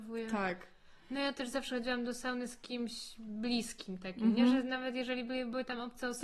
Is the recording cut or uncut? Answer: uncut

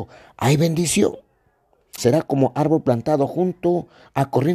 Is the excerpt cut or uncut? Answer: cut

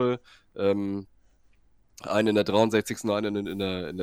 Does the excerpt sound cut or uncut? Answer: uncut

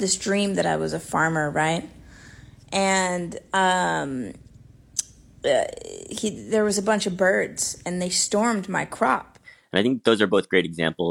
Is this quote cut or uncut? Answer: uncut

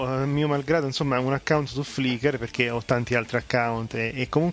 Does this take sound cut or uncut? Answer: uncut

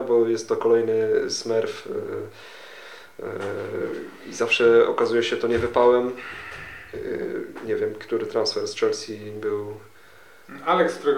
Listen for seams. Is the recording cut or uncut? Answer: uncut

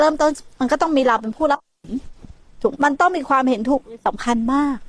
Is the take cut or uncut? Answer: cut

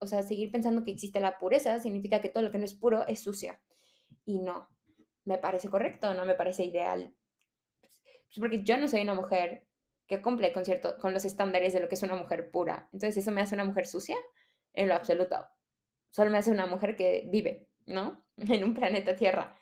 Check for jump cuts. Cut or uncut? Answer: uncut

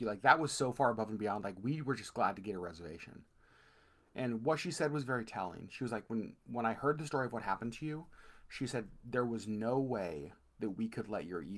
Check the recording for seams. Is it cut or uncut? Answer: uncut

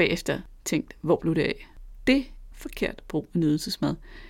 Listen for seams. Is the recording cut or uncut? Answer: cut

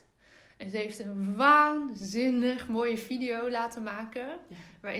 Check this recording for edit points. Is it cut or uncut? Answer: uncut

